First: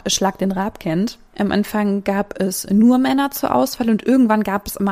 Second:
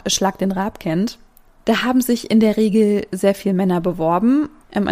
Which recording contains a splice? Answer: first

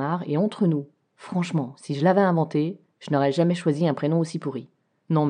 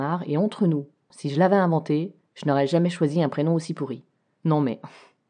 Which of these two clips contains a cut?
second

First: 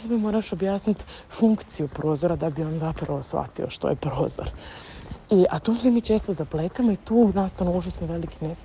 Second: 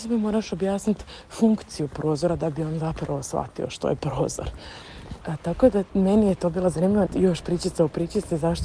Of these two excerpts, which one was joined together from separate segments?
second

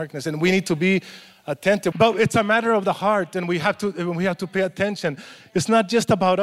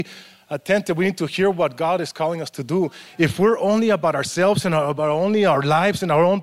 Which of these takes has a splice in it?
first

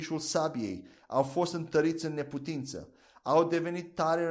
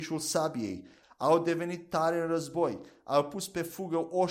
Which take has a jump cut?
second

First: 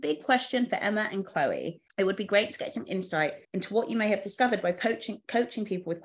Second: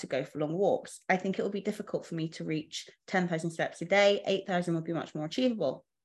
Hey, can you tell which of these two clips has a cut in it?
first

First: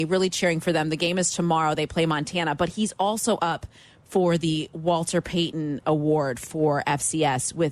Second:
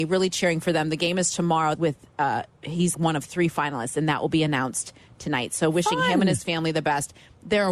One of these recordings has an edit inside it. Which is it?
second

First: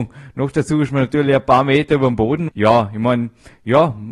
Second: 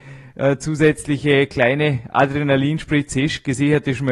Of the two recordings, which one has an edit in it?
first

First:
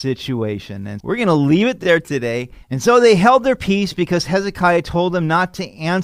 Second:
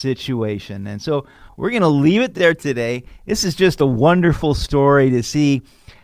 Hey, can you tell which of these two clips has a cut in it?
first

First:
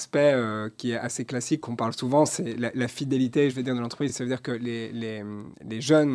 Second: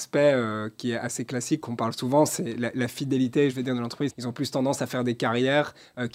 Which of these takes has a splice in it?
second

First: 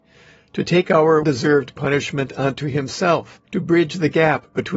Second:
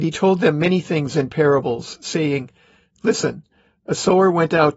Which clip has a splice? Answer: first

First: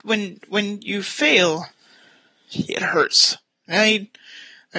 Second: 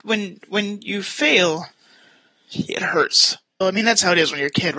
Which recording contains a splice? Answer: second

